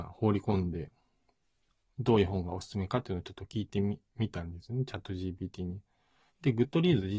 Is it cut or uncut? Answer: cut